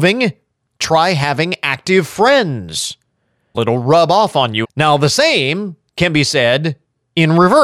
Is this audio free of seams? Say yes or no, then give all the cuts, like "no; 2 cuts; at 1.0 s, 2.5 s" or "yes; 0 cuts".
no; 2 cuts; at 3.5 s, 4.6 s